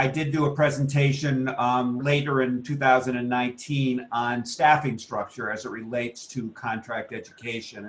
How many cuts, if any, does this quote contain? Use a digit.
1